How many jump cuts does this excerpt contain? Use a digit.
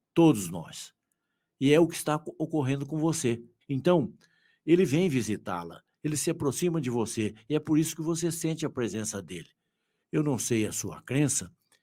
2